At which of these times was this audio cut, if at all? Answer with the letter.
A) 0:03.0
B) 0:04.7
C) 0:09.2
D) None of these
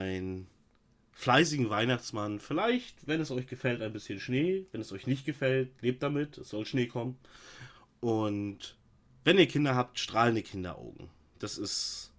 D